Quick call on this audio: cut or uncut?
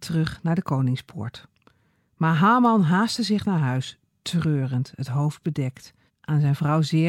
uncut